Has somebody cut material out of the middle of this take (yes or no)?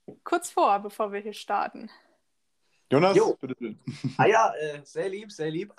no